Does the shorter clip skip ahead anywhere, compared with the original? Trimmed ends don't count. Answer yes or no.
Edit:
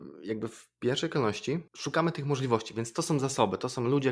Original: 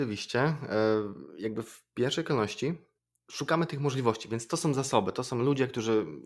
yes